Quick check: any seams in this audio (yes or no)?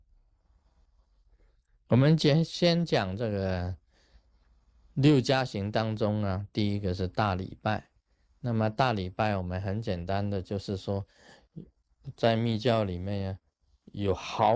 no